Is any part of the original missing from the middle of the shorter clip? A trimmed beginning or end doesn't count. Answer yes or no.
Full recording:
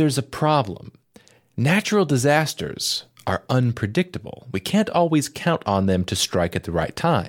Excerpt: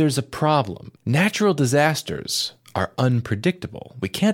yes